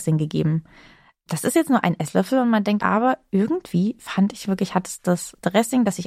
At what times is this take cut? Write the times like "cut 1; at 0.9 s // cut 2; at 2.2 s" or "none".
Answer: cut 1; at 2.8 s